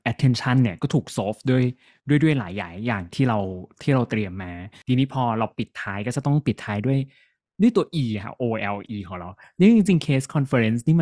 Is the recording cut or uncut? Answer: uncut